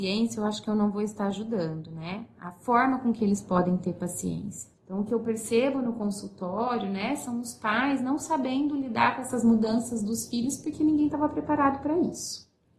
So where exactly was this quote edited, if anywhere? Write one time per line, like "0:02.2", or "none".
0:04.7